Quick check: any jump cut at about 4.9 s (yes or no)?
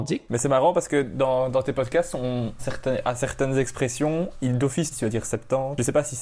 yes